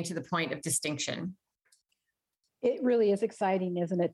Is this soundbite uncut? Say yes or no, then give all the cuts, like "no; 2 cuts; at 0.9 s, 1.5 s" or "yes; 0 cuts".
yes; 0 cuts